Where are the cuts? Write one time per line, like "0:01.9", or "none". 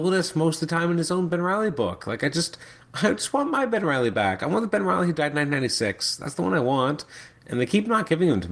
none